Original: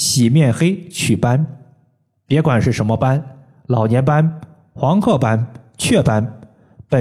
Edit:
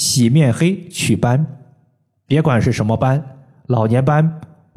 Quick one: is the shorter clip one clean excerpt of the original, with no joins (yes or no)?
yes